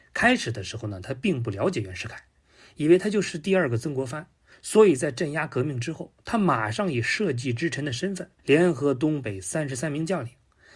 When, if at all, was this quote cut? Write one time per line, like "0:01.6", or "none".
0:04.5
0:08.4